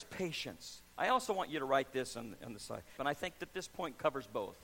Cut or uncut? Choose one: cut